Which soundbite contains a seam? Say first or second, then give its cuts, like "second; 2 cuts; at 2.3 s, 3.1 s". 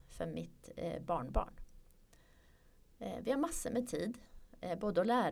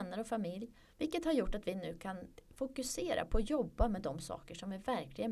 second; 1 cut; at 0.9 s